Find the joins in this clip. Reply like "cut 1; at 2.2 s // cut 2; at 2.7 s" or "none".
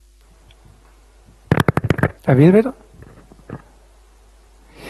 cut 1; at 2.2 s

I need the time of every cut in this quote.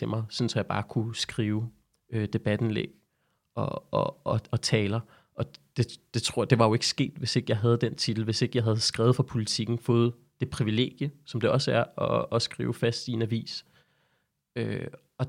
none

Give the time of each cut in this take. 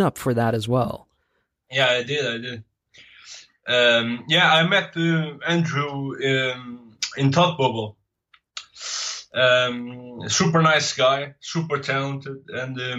none

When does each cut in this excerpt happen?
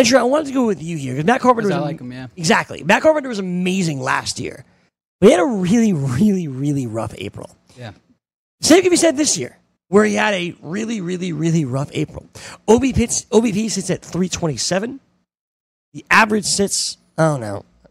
none

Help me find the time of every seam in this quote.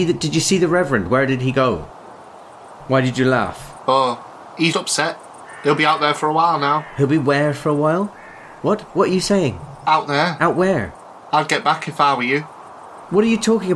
cut 1; at 4.7 s

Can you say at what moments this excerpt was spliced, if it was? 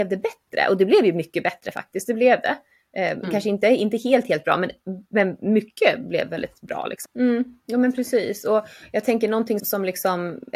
cut 1; at 7.0 s // cut 2; at 9.6 s

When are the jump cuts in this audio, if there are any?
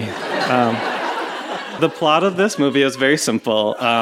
cut 1; at 1.8 s

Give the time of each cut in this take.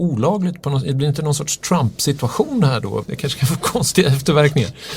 cut 1; at 3.0 s

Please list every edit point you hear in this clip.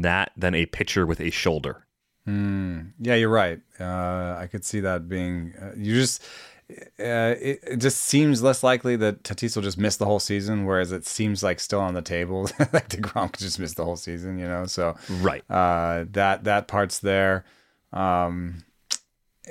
none

